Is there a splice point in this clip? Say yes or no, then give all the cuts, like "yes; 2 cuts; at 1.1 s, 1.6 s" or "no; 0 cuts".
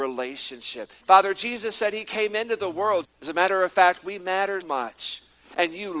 yes; 3 cuts; at 1.0 s, 3.0 s, 4.6 s